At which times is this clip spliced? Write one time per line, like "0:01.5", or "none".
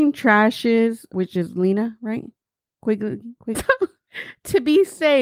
0:01.1
0:03.5